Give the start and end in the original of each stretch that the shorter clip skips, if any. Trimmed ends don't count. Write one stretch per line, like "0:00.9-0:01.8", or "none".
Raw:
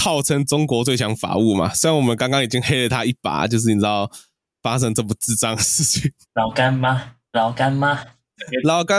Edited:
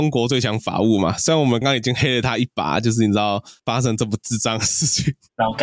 0:02.2-0:02.3
0:04.3-0:04.6